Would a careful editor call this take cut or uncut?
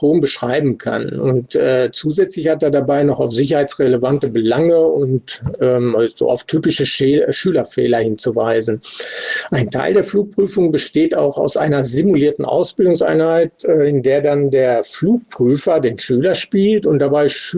uncut